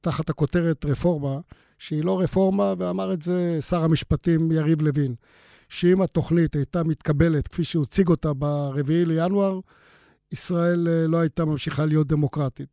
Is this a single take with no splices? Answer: no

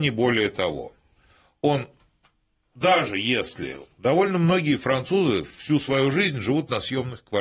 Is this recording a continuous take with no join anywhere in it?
yes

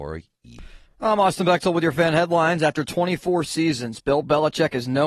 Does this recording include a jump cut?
no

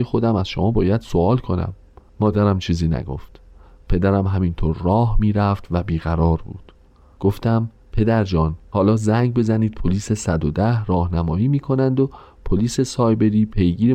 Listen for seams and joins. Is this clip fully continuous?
yes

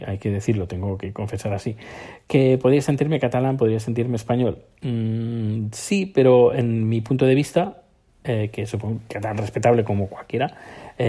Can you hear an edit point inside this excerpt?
no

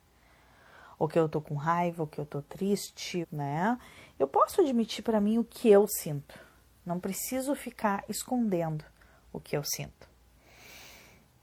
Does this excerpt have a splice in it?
yes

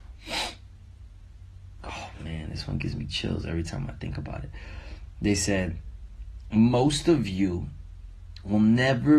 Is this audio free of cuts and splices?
yes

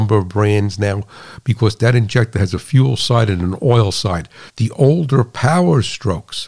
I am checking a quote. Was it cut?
yes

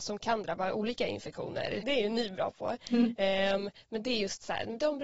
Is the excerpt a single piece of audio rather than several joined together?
no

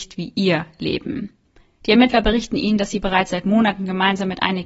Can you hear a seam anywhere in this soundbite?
no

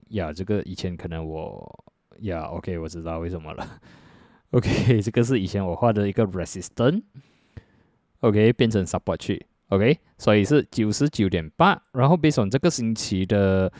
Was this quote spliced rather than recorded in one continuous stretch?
no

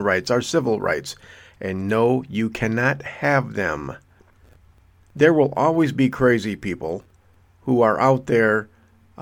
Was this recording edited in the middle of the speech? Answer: no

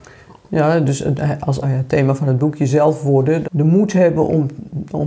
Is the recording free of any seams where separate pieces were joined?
no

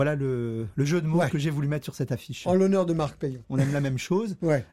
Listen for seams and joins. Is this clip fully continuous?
no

